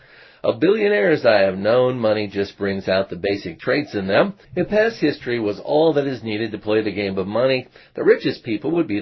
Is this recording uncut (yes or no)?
no